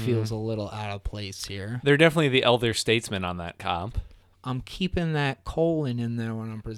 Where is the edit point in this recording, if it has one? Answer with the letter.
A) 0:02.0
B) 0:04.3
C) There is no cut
B